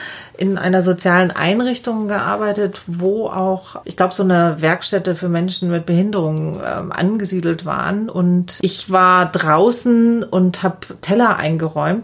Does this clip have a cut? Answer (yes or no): no